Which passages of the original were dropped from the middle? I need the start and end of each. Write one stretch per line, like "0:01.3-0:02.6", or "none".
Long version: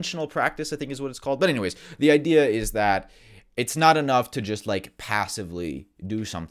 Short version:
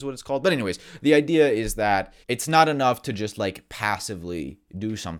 0:03.2-0:03.5